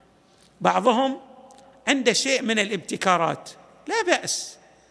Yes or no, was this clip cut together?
no